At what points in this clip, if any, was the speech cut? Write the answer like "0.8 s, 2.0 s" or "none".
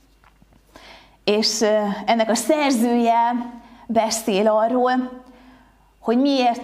none